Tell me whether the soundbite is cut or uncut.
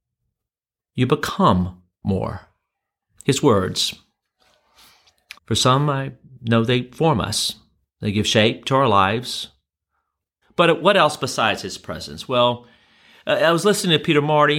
cut